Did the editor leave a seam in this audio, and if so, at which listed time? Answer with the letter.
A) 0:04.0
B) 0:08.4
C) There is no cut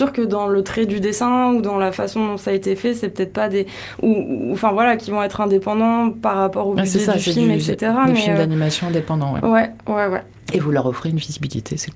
C